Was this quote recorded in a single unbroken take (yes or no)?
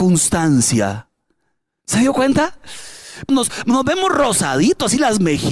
no